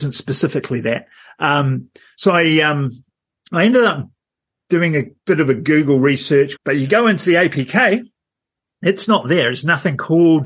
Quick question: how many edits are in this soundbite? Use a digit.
2